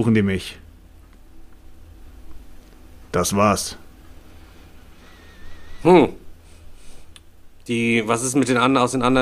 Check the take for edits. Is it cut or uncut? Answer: uncut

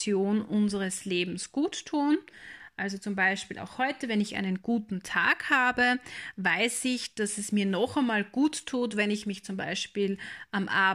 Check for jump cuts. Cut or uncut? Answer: uncut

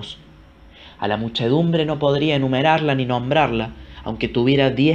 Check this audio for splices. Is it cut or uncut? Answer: uncut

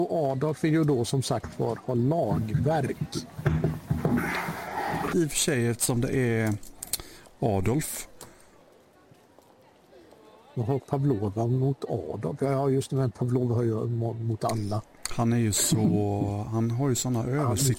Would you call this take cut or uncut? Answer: cut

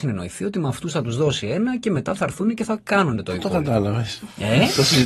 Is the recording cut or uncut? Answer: uncut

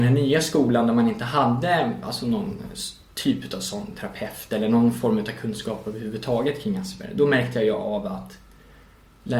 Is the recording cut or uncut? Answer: uncut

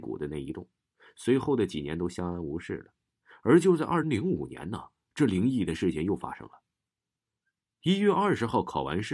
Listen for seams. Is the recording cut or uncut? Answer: cut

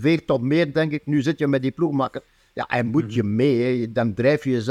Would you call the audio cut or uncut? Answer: uncut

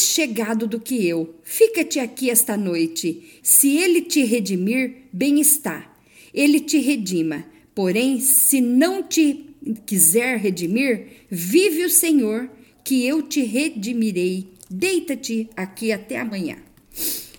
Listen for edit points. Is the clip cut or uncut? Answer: cut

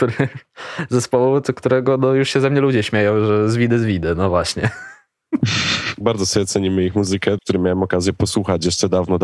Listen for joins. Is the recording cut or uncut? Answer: cut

